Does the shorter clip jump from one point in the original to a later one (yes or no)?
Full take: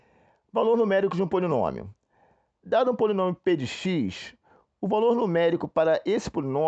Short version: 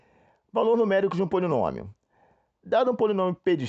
no